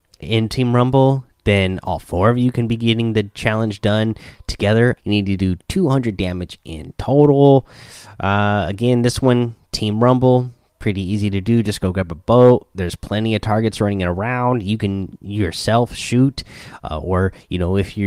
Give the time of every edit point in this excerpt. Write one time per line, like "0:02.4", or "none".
0:05.0